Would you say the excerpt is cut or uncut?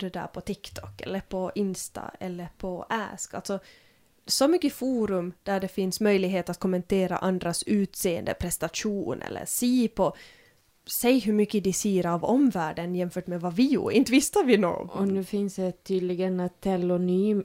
uncut